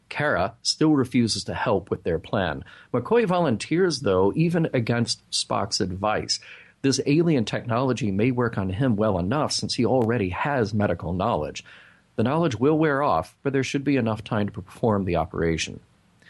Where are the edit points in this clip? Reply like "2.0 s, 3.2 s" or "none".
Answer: none